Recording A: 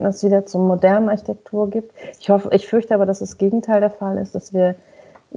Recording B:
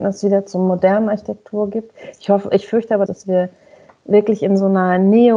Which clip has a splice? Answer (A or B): B